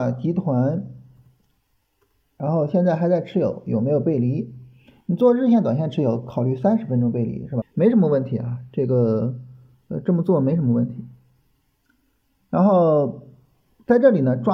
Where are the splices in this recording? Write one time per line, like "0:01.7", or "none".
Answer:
0:07.6